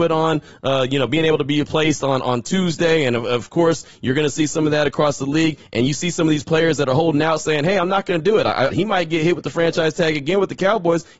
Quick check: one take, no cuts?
no; 1 cut; at 8.7 s

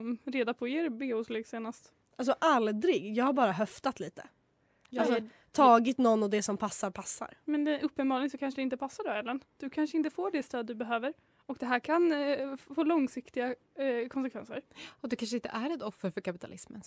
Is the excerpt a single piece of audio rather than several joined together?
yes; 0 cuts

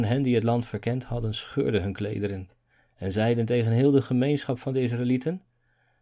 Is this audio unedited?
yes; 0 cuts

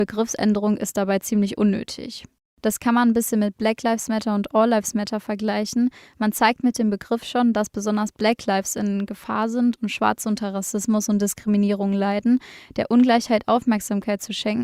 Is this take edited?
no; 0 cuts

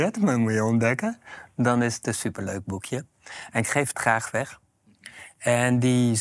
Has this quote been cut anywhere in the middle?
no; 0 cuts

